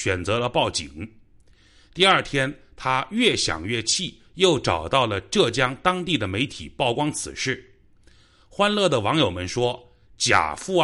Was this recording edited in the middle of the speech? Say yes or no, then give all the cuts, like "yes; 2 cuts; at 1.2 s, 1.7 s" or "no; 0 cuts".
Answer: no; 0 cuts